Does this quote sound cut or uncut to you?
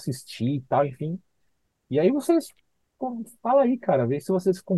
uncut